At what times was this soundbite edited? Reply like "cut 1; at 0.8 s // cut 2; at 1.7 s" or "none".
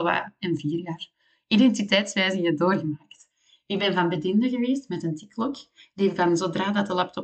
none